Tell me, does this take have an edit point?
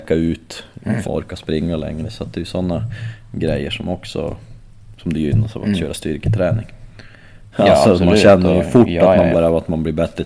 yes; 3 cuts; at 1.0 s, 7.5 s, 9.3 s

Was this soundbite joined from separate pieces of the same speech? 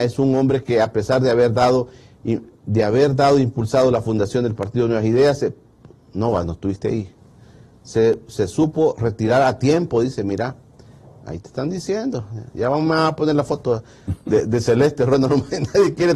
no; 0 cuts

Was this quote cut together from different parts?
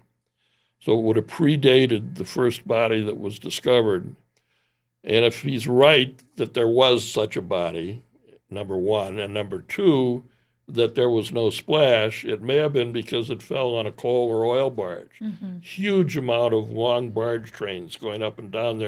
no; 0 cuts

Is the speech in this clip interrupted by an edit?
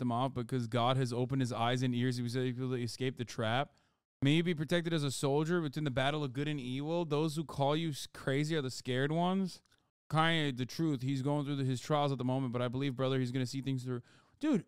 no; 0 cuts

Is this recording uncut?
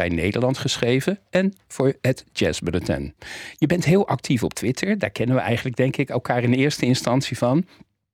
yes; 0 cuts

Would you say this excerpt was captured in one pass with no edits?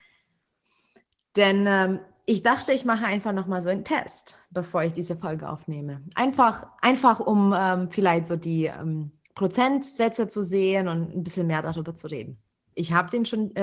no; 1 cut; at 12.7 s

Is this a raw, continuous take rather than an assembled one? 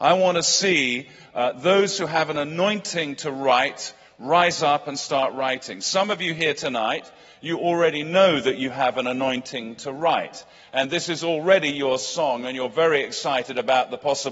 yes; 0 cuts

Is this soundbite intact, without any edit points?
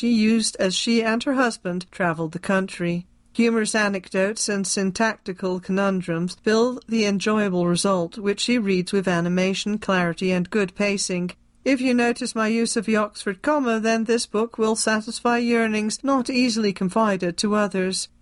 yes; 0 cuts

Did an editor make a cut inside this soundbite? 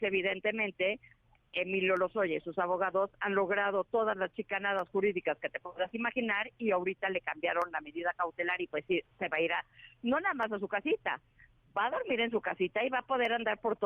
no; 0 cuts

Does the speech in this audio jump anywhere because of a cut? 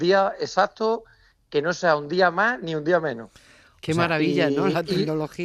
no; 0 cuts

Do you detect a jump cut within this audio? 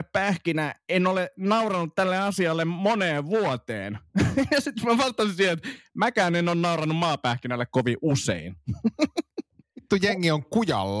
no; 0 cuts

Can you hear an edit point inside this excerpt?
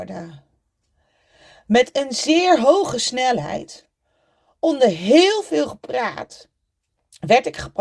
no; 0 cuts

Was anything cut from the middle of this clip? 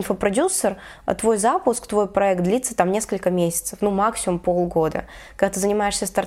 no; 0 cuts

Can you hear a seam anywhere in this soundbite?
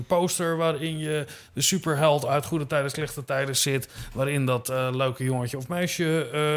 no; 0 cuts

